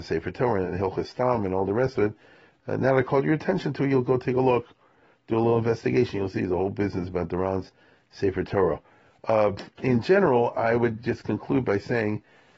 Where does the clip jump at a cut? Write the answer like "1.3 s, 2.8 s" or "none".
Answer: none